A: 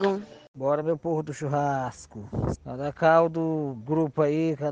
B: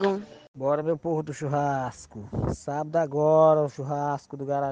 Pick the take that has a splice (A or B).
A